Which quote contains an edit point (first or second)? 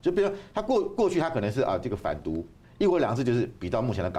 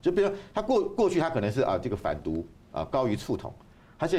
first